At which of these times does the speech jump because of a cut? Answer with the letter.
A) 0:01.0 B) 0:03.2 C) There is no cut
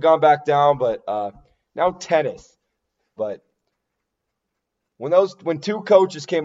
B